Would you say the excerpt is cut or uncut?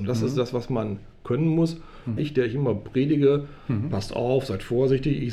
cut